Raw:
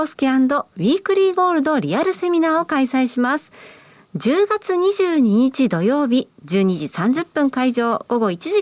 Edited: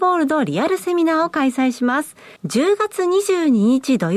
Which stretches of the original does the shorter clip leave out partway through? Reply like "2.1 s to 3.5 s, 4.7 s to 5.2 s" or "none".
3.7 s to 4.1 s